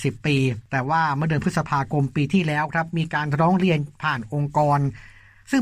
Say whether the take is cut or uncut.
uncut